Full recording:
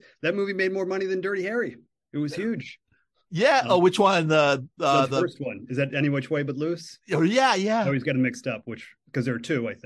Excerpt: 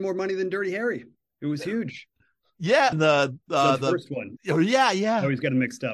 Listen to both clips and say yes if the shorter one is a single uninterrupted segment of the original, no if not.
no